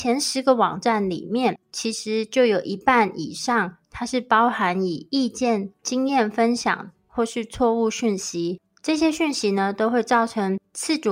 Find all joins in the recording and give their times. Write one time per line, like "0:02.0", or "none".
none